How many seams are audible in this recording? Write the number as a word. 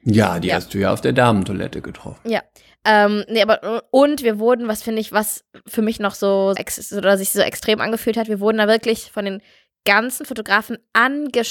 one